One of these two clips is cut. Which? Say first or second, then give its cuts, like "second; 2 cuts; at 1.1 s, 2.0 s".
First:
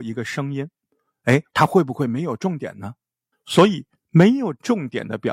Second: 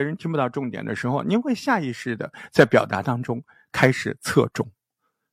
first; 2 cuts; at 1.5 s, 3.3 s